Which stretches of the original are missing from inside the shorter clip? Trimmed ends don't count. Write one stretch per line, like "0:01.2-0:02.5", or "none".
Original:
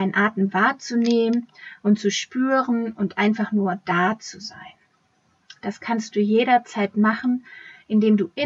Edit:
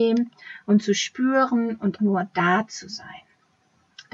0:03.1-0:03.5